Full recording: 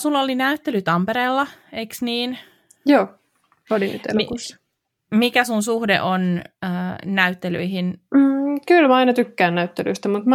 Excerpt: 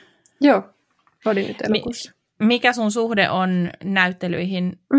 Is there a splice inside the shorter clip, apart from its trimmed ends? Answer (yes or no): yes